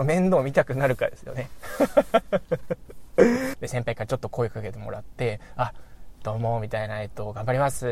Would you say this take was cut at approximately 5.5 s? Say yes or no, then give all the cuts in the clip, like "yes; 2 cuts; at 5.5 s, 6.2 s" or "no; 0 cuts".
no; 1 cut; at 3.5 s